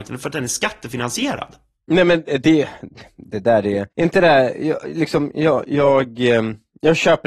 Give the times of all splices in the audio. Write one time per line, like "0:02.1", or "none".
0:03.9